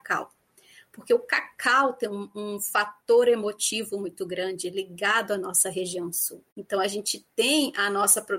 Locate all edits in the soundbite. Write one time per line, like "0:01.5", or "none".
0:06.5